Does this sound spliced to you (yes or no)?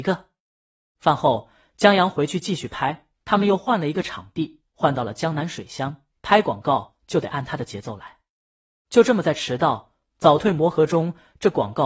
yes